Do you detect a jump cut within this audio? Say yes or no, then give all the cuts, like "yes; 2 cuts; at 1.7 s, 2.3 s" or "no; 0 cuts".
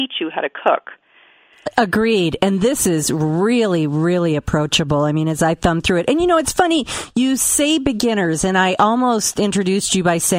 no; 0 cuts